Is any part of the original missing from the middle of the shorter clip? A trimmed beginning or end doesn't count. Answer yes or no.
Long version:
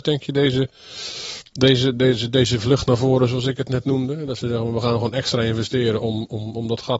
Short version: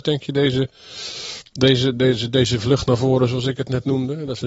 no